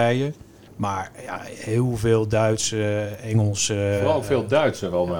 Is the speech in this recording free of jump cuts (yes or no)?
yes